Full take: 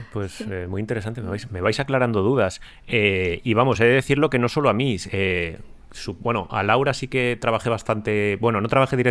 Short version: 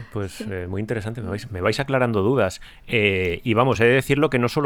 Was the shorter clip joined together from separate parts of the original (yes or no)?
no